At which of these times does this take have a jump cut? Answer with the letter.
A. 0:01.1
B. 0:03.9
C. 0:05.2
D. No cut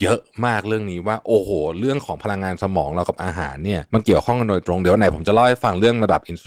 B